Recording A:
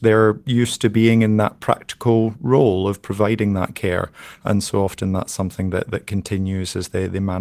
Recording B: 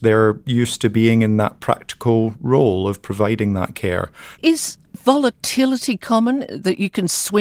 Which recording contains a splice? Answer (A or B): B